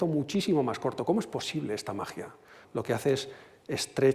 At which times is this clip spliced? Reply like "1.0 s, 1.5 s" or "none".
2.6 s